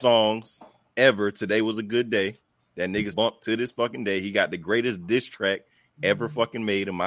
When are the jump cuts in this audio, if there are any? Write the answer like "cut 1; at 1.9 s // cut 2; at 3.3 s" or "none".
cut 1; at 3.1 s